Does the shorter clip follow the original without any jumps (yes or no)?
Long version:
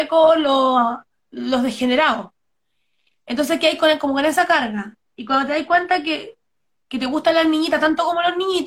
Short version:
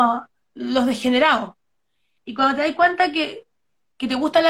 no